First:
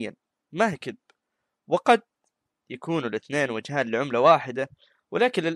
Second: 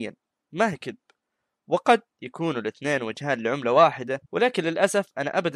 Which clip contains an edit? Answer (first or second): second